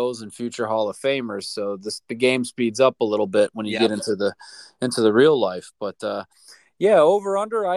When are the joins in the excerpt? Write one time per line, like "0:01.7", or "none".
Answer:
none